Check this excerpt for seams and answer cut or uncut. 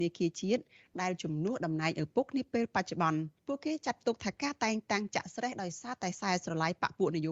cut